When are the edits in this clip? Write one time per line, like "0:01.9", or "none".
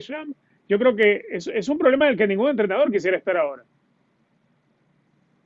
none